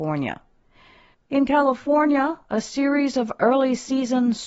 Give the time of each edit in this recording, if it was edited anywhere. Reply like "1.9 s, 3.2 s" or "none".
1.1 s